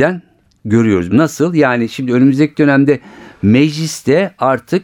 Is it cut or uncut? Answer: cut